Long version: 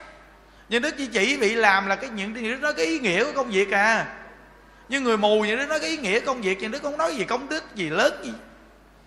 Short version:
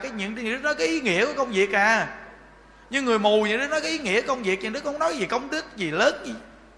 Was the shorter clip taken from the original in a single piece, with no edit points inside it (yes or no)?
yes